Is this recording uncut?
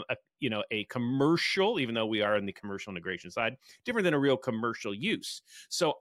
yes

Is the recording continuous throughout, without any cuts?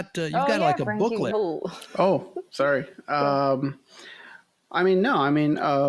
no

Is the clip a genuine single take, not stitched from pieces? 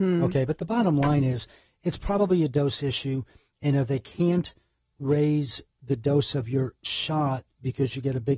yes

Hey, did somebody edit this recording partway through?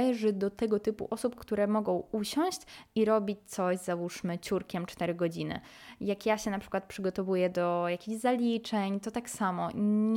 no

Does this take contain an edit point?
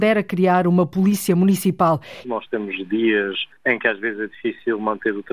yes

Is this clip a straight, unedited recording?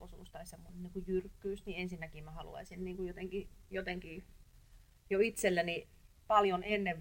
yes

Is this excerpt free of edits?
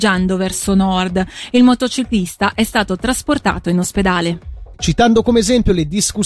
no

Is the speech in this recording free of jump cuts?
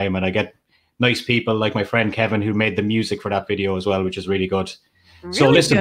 yes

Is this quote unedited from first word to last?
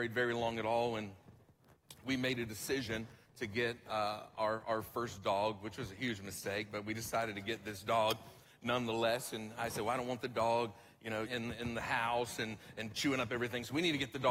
no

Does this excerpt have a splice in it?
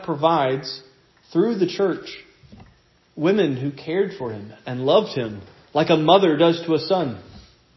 no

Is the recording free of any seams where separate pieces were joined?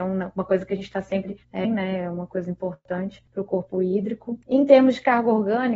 no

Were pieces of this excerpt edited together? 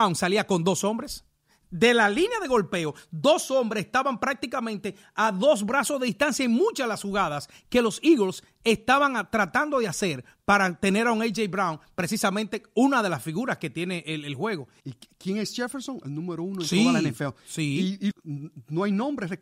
yes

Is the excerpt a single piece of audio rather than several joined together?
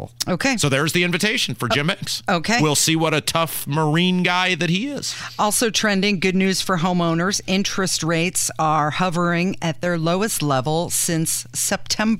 yes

